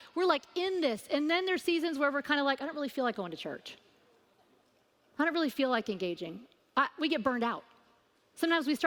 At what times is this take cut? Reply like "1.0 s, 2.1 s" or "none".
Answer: none